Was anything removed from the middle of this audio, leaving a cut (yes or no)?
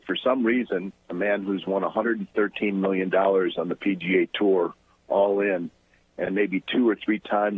no